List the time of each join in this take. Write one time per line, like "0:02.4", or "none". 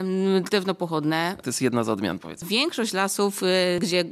0:01.4